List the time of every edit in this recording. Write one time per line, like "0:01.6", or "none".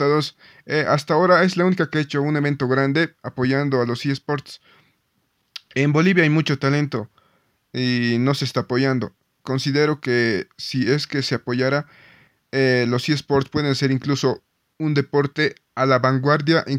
none